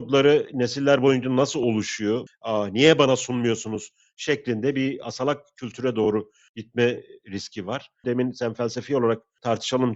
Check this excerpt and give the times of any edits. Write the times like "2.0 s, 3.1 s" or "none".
2.3 s, 8.0 s